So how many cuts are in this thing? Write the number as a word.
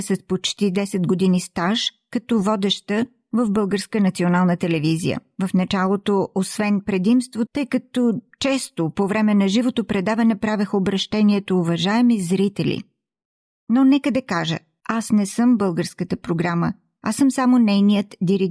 two